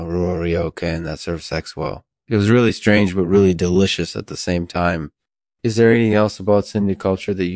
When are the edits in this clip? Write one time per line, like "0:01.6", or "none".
none